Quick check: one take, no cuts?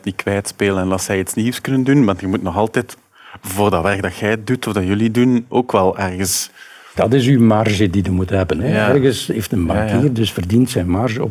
yes; 0 cuts

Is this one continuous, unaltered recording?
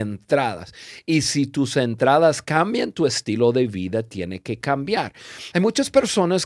no; 1 cut; at 5.5 s

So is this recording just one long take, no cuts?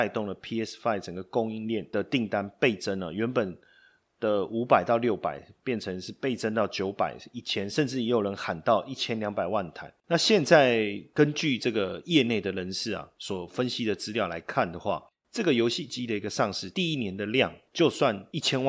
no; 1 cut; at 10.0 s

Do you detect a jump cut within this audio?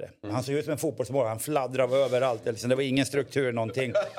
no; 0 cuts

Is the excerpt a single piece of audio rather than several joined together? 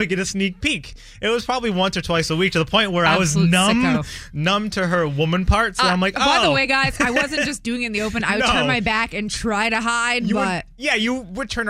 yes; 0 cuts

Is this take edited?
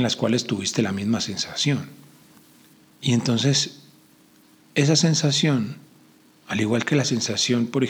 no; 0 cuts

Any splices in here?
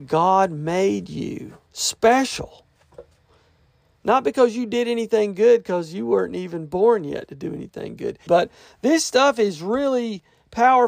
yes; 2 cuts; at 3.9 s, 8.3 s

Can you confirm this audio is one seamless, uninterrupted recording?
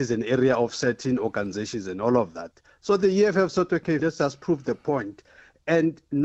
no; 1 cut; at 4.0 s

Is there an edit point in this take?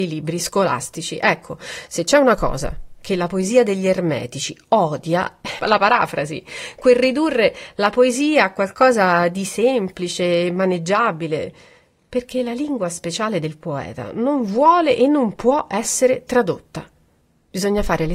yes; 1 cut; at 5.6 s

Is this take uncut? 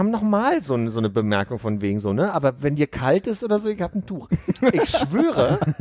yes; 0 cuts

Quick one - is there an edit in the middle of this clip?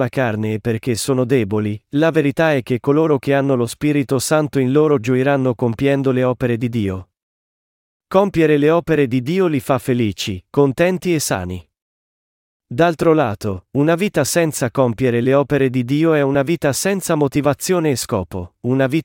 no; 0 cuts

